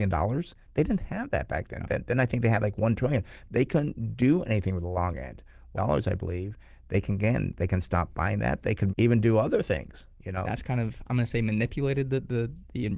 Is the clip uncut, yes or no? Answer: no